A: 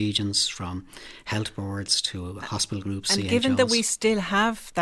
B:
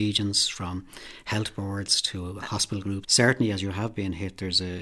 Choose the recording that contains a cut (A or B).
B